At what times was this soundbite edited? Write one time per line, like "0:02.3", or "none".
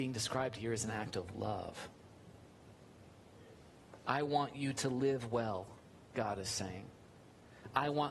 none

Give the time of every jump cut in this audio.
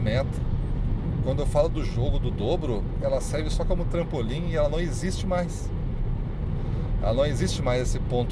0:03.0

